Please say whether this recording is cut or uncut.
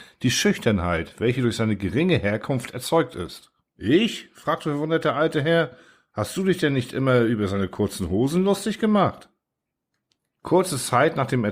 cut